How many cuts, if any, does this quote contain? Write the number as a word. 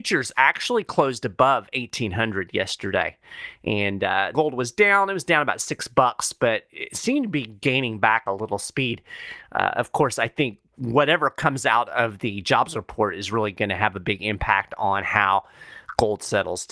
one